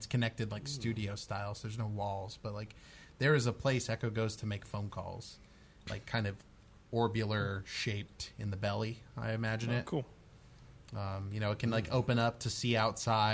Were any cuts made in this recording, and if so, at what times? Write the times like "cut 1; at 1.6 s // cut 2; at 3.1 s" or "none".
cut 1; at 5.8 s